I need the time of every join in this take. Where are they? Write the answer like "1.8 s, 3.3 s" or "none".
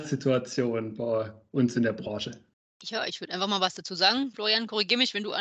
none

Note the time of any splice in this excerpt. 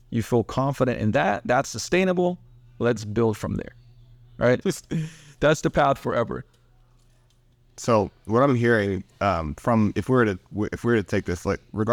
4.6 s

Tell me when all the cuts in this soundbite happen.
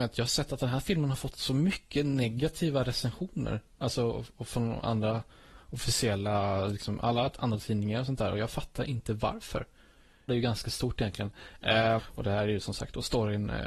10.3 s, 12.0 s

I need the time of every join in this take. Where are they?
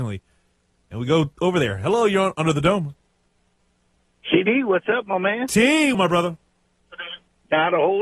5.9 s

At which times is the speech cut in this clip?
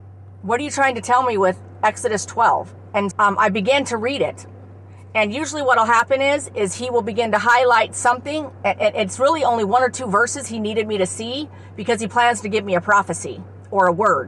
3.1 s

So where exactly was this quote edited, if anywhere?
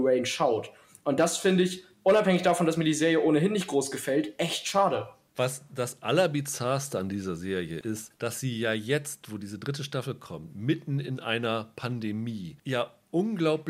7.8 s

